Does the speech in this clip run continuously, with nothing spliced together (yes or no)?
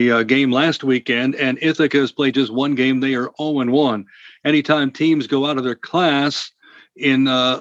yes